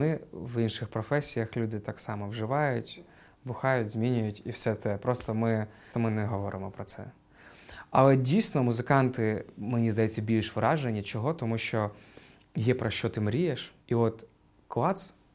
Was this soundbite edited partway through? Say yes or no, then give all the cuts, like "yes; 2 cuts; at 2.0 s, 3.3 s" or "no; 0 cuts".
yes; 2 cuts; at 5.9 s, 13.8 s